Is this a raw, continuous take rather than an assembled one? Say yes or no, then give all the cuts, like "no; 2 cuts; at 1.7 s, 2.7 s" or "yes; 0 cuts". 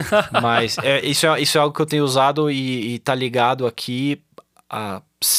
yes; 0 cuts